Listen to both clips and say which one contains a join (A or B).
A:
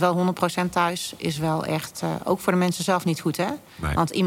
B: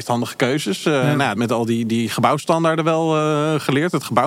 B